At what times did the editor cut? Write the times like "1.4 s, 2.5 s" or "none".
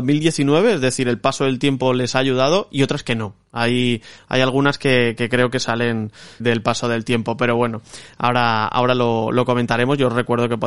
6.4 s

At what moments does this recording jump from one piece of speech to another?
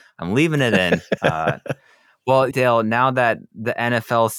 1.2 s, 2.5 s

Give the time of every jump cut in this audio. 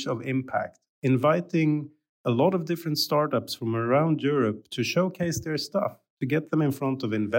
none

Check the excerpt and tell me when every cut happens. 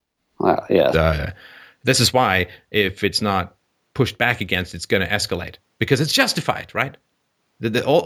0.9 s

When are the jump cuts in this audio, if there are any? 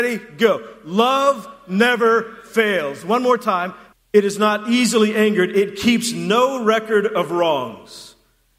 3.9 s

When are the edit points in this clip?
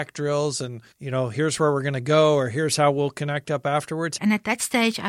0.9 s, 4.2 s

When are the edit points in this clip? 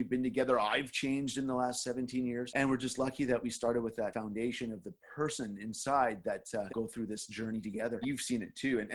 6.7 s, 8.0 s

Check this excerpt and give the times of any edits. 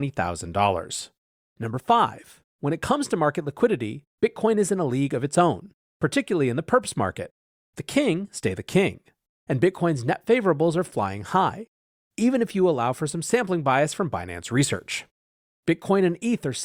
12.0 s, 15.5 s

